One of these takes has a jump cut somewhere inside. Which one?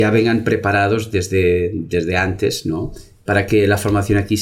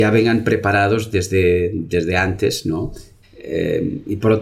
second; 1 cut; at 3.2 s

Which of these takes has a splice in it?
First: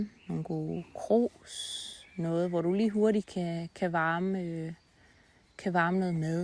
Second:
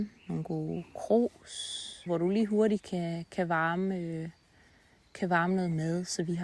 second; 1 cut; at 2.1 s

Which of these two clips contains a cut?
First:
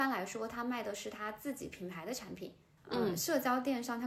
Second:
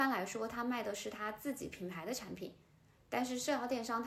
first; 1 cut; at 2.8 s

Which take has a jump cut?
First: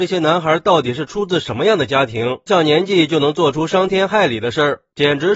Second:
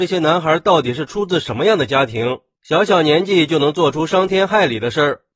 first; 1 cut; at 2.5 s

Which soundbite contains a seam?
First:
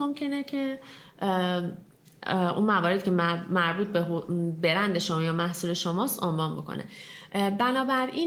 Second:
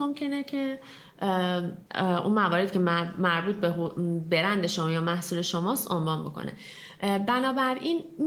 second; 1 cut; at 1.9 s

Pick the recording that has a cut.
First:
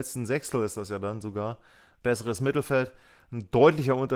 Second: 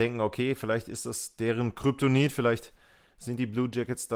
first; 1 cut; at 2.0 s

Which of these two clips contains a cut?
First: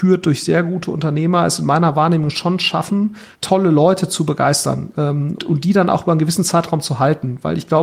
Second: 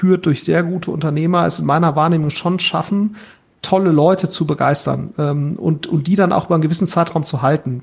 first; 2 cuts; at 3.3 s, 5.4 s

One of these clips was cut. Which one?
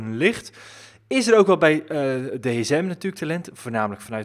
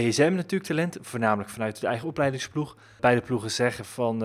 second; 1 cut; at 3.0 s

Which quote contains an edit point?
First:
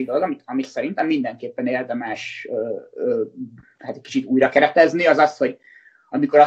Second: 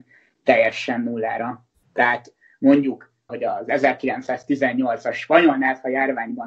second; 2 cuts; at 1.8 s, 3.3 s

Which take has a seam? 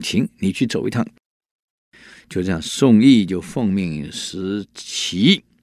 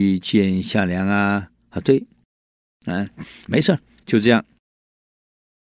second; 2 cuts; at 2.6 s, 4.0 s

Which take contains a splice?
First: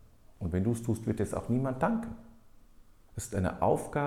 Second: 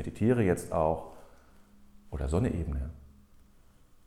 first; 1 cut; at 3.1 s

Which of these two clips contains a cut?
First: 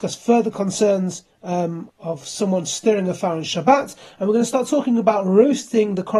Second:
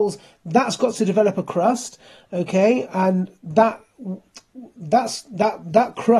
first; 1 cut; at 1.9 s

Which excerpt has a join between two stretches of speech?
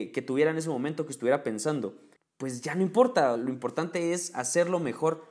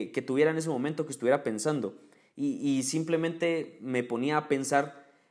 first; 2 cuts; at 2.2 s, 3.4 s

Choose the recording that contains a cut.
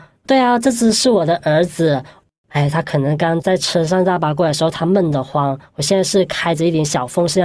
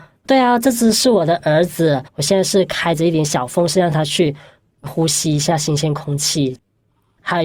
second; 1 cut; at 2.1 s

